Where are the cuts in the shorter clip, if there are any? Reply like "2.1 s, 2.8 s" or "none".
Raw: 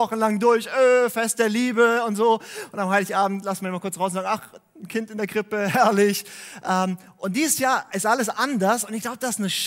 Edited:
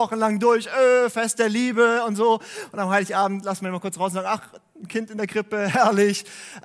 none